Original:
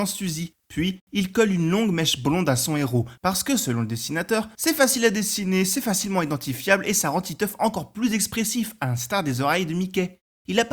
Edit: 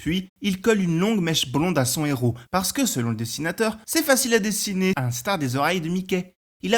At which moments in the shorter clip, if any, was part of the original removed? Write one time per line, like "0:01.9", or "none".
0:04.9